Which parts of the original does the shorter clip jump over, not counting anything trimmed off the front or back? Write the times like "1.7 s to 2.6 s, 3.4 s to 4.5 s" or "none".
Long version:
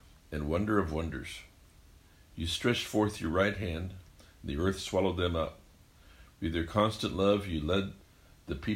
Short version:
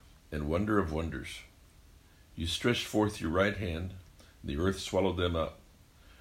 none